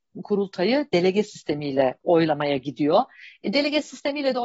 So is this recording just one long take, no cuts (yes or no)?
yes